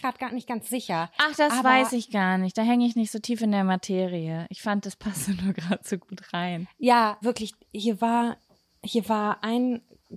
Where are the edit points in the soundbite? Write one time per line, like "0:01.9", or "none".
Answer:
0:07.2